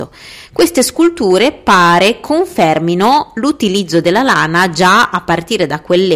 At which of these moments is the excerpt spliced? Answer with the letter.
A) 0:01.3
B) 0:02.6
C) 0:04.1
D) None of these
D